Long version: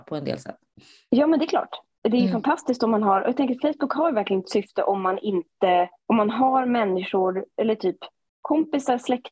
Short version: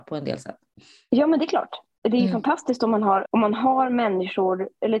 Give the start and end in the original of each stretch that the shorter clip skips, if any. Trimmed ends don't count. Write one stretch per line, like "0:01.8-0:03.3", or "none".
0:03.2-0:06.0

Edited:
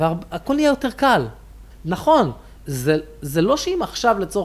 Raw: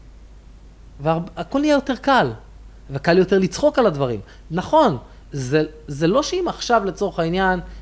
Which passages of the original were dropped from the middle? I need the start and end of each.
0:02.8-0:04.4

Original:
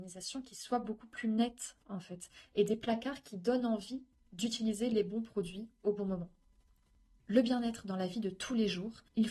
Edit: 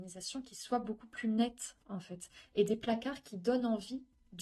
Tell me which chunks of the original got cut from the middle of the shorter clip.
none

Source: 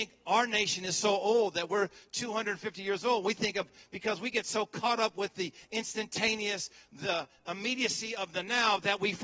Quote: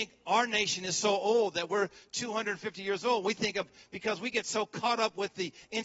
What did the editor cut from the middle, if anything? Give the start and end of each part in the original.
none

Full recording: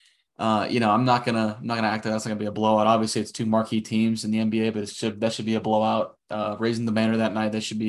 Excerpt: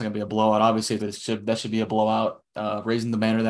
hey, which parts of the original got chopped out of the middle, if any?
0:03.2-0:04.7

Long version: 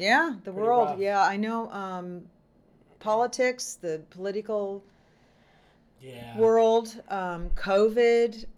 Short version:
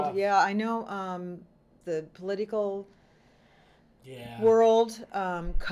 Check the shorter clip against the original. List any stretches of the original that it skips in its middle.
0:02.6-0:03.8

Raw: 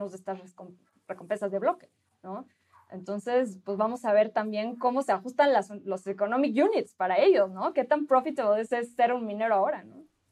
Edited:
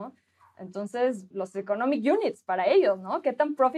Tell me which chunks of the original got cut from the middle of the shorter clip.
0:03.6-0:05.8

